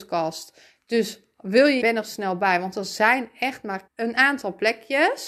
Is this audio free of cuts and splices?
no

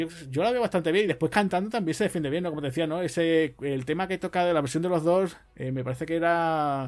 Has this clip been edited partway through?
no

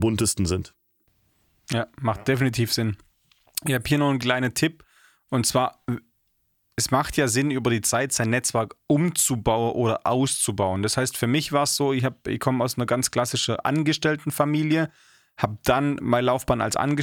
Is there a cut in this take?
no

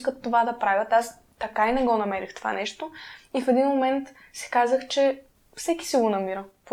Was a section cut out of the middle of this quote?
no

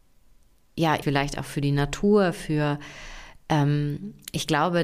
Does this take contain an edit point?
yes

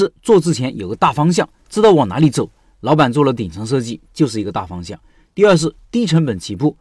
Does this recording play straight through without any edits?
yes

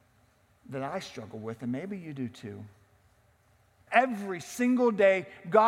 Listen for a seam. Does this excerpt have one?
yes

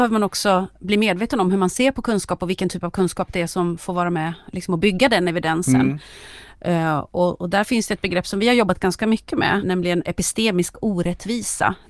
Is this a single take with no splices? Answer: no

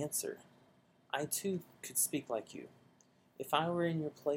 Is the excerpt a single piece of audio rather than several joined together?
yes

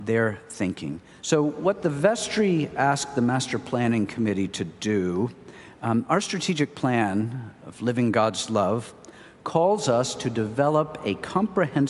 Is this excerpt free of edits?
no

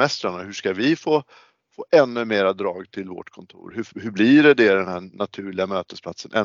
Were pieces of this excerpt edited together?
no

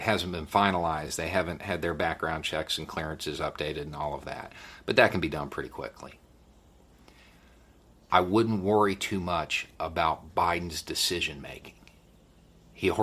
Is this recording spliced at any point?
no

